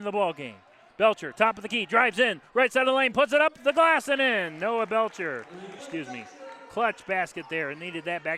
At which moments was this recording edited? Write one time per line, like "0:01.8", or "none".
0:05.8